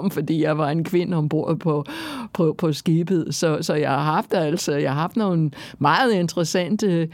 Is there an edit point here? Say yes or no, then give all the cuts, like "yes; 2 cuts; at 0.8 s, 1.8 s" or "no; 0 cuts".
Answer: no; 0 cuts